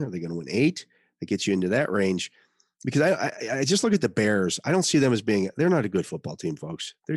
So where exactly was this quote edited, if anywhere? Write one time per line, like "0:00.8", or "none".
none